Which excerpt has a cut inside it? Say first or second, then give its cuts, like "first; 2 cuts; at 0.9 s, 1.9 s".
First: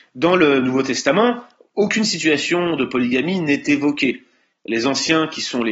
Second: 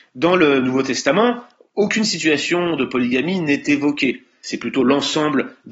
second; 1 cut; at 4.4 s